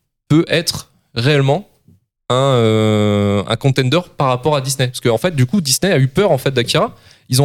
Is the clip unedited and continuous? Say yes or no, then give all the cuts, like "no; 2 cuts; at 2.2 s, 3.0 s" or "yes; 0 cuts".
yes; 0 cuts